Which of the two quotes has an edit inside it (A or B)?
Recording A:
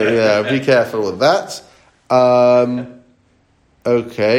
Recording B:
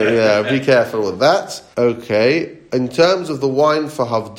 B